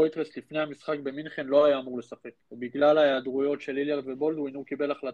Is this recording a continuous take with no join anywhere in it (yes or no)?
no